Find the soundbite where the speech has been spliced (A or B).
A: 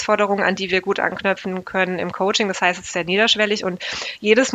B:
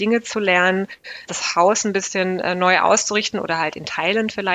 B